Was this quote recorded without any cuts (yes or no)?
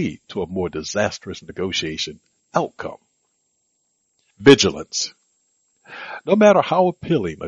yes